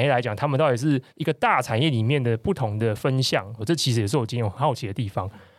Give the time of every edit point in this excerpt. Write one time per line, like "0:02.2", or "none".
0:01.1
0:03.6